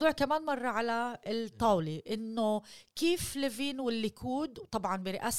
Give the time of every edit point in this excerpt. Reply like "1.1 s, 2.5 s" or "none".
none